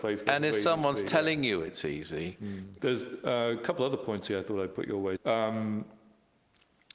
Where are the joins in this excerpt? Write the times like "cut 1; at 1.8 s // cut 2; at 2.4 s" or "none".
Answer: cut 1; at 2.8 s // cut 2; at 5.2 s